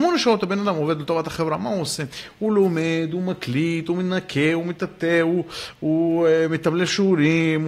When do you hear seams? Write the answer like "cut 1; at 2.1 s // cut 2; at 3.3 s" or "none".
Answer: none